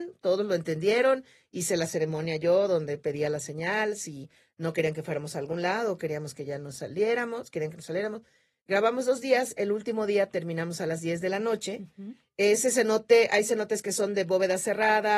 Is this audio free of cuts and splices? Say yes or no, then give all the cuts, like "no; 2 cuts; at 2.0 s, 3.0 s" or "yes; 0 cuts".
yes; 0 cuts